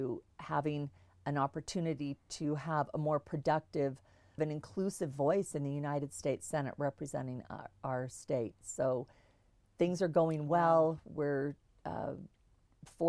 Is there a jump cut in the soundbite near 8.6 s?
no; 1 cut; at 4.4 s

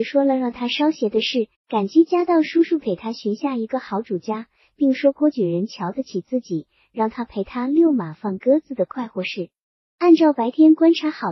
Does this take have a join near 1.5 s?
yes; 2 cuts; at 1.5 s, 9.9 s

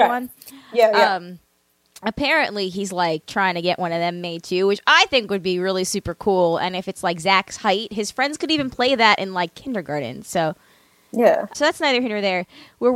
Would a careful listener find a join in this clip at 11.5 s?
yes; 1 cut; at 11.5 s

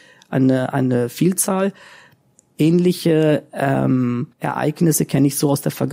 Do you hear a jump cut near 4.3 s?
yes; 1 cut; at 4.3 s

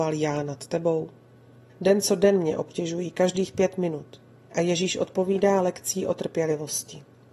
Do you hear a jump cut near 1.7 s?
yes; 2 cuts; at 1.7 s, 4.5 s

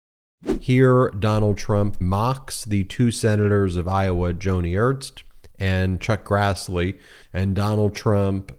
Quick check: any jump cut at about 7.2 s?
yes; 2 cuts; at 2.0 s, 7.2 s

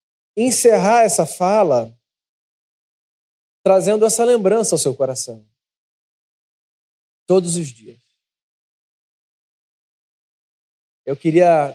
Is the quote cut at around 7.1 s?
yes; 1 cut; at 7.1 s

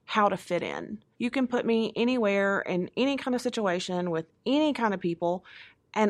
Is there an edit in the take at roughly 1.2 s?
yes; 1 cut; at 1.2 s

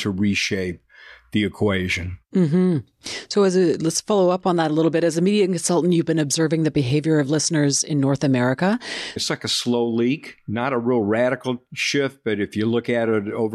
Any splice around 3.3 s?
no; 1 cut; at 9.2 s

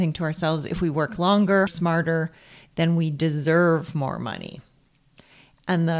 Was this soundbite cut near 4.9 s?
no; 1 cut; at 1.7 s

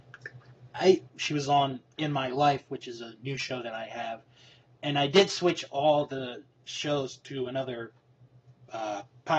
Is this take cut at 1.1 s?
yes; 1 cut; at 1.1 s

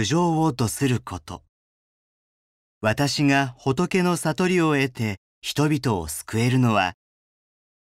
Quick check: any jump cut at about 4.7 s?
no; 1 cut; at 2.6 s

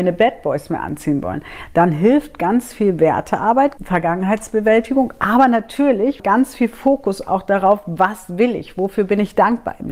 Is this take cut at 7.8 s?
no; 2 cuts; at 3.8 s, 6.2 s

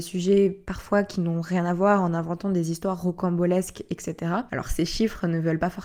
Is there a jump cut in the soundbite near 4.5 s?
yes; 1 cut; at 4.5 s

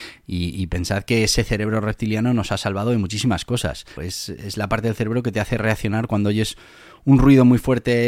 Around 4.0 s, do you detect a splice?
yes; 1 cut; at 4.0 s

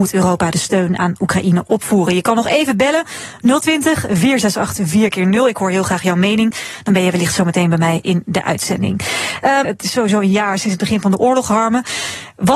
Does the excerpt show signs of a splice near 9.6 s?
yes; 1 cut; at 9.6 s

